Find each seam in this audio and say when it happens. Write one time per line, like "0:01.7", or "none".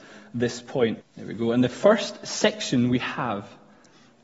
0:01.0